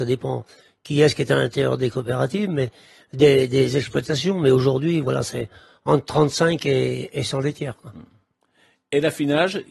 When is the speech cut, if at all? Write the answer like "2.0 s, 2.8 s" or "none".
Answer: none